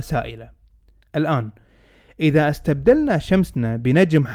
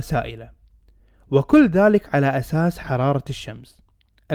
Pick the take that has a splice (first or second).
first